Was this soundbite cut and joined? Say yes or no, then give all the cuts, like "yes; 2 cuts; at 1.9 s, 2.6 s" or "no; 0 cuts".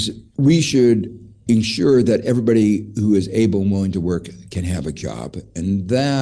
yes; 1 cut; at 1.5 s